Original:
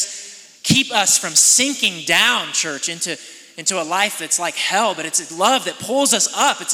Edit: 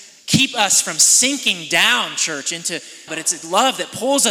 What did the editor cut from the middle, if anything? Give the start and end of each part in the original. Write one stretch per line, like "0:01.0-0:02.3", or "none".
0:03.4-0:04.9